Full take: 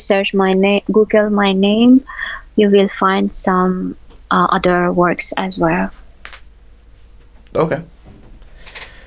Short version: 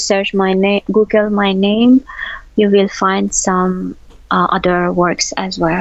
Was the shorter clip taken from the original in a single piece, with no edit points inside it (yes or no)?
yes